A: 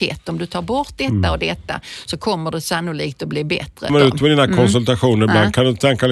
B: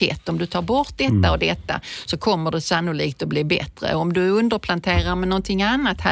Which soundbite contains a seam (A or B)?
A